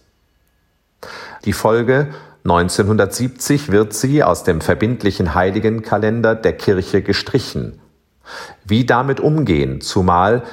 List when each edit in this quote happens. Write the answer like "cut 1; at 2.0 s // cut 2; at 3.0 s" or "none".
cut 1; at 1.4 s